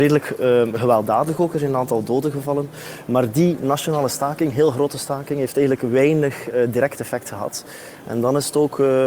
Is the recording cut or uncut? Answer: uncut